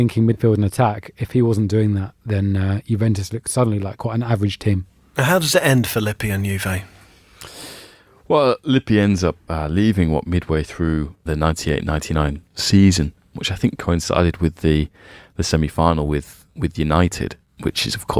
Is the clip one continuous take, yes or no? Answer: yes